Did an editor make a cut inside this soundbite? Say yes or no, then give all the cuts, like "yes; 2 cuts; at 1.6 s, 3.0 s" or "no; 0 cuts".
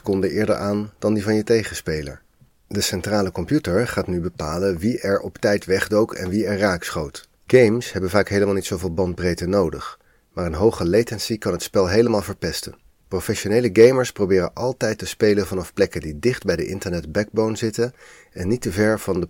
yes; 2 cuts; at 7.5 s, 12.9 s